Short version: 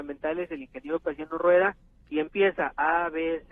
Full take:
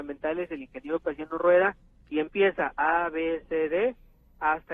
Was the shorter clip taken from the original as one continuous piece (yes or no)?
yes